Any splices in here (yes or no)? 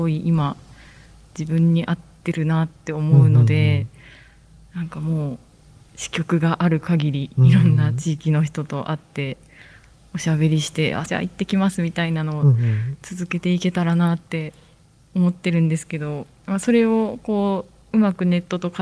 yes